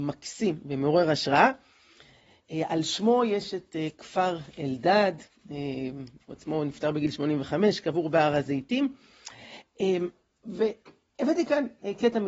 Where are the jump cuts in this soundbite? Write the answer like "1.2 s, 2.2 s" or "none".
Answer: none